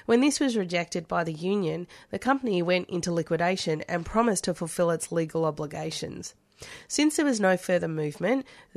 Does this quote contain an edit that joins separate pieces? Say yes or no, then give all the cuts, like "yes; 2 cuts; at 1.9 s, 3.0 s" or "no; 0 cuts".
no; 0 cuts